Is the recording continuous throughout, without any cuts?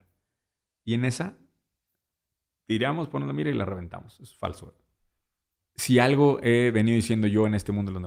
no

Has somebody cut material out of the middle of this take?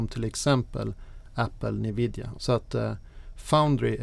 yes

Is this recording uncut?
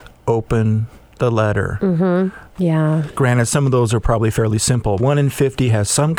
no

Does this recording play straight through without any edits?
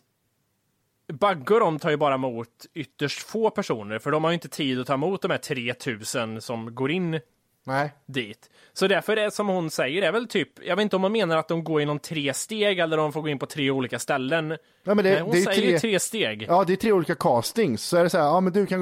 yes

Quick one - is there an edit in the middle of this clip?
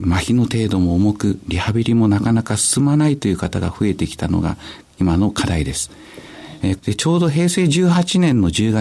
yes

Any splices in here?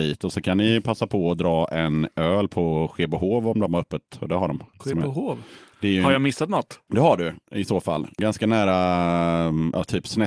no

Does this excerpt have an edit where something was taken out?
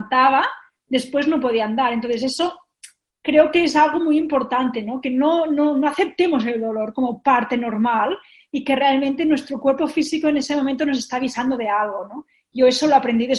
no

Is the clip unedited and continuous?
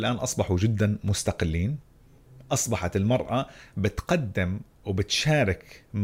yes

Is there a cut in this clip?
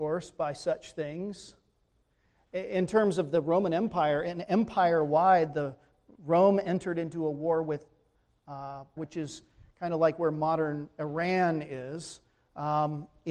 yes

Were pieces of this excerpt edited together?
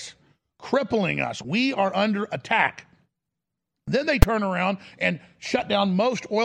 yes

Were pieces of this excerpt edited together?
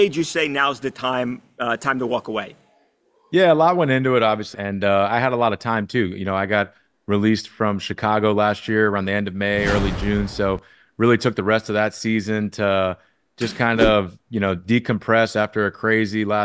yes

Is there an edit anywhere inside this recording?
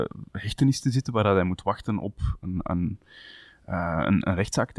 no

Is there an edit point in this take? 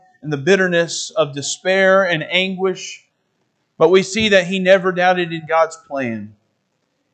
no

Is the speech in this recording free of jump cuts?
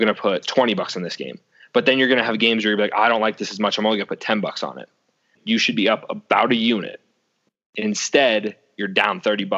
no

